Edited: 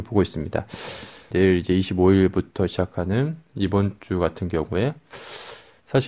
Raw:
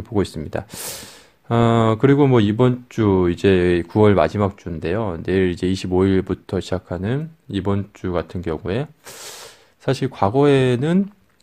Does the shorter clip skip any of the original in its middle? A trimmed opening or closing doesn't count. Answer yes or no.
yes